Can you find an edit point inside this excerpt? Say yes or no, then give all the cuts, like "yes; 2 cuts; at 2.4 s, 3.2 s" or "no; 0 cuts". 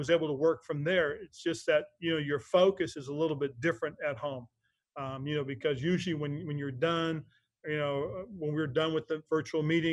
no; 0 cuts